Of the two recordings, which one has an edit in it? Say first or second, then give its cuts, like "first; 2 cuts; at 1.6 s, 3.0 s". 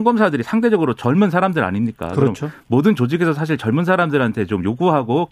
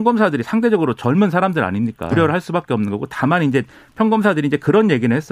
second; 1 cut; at 2.1 s